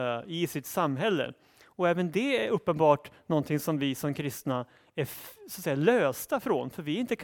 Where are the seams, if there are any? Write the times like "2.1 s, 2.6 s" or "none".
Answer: none

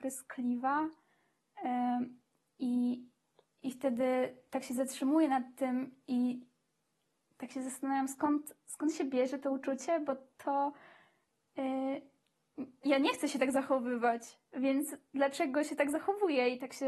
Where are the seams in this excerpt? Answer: 12.8 s

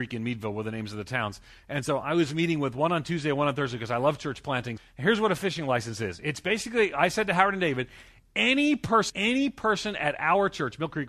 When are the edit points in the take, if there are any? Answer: 4.8 s, 9.1 s

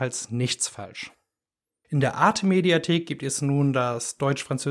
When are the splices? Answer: 1.8 s

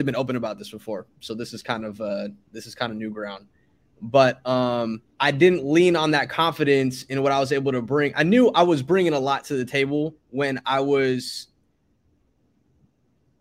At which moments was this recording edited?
5.1 s, 10.2 s

